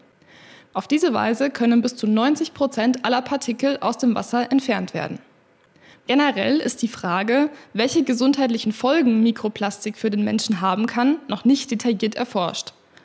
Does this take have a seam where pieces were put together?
yes; 1 cut; at 5.9 s

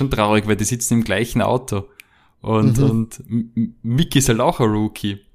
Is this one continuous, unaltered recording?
yes; 0 cuts

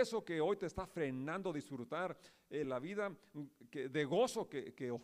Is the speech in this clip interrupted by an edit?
yes; 1 cut; at 2.6 s

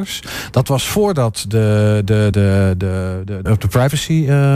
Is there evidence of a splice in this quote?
yes; 2 cuts; at 2.3 s, 3.5 s

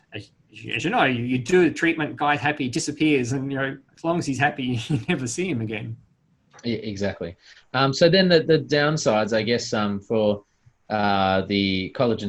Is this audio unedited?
yes; 0 cuts

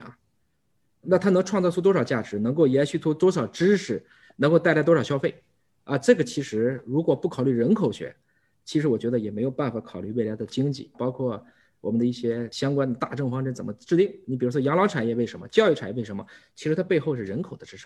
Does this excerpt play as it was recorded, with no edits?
no; 1 cut; at 10.9 s

